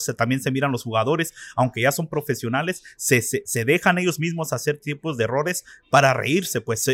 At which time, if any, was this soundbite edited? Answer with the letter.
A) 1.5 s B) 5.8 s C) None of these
C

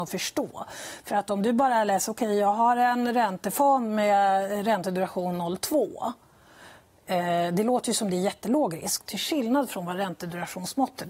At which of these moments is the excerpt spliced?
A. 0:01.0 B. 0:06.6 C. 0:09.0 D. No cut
C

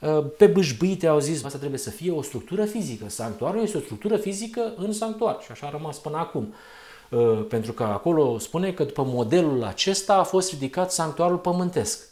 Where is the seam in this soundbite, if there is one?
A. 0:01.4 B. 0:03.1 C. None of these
A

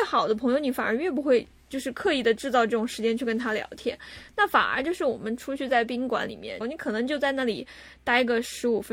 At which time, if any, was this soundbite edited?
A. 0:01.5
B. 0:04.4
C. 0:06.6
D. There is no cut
C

